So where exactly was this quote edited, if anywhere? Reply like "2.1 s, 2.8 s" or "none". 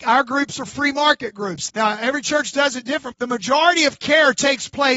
1.7 s, 3.1 s